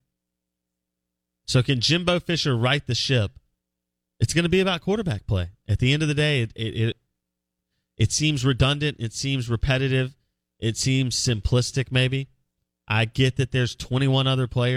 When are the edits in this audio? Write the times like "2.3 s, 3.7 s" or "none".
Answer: none